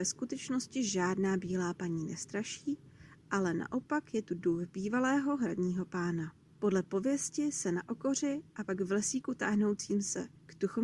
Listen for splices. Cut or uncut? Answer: uncut